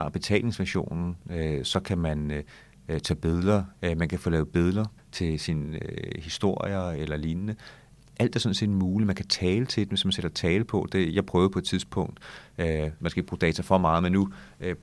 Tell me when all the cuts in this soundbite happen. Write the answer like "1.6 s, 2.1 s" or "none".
3.7 s, 13.0 s